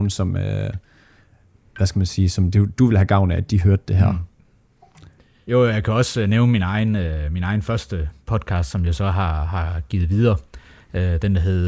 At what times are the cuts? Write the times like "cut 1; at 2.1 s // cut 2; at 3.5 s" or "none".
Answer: none